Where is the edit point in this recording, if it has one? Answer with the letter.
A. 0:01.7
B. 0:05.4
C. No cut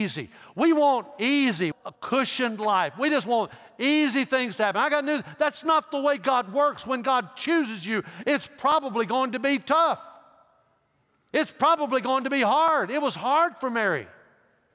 A